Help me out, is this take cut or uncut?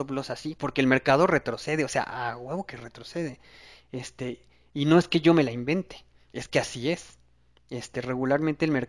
uncut